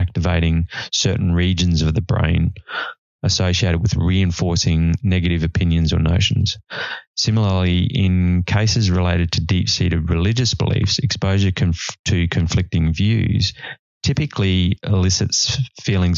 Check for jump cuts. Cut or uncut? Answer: uncut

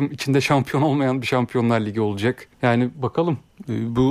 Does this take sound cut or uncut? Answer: cut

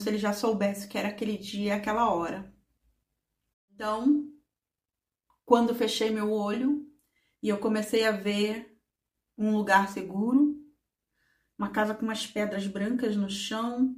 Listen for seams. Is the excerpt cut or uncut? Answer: cut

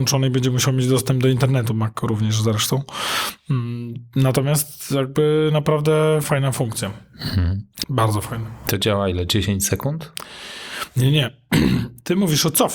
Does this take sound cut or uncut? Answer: cut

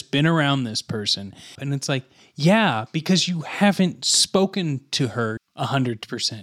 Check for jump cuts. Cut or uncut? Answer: cut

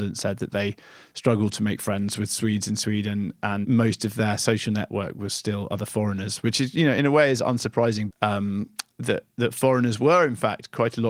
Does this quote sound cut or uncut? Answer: cut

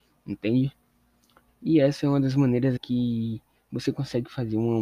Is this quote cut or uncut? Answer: cut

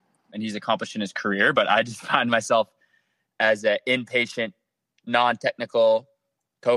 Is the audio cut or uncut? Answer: uncut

